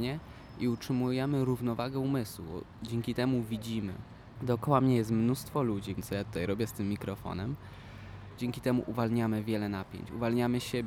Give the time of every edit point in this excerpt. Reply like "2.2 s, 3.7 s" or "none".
4.4 s, 6.0 s, 8.4 s